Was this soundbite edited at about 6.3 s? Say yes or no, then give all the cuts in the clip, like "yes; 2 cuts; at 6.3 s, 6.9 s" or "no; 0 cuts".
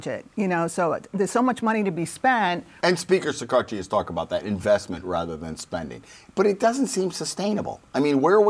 no; 1 cut; at 2.8 s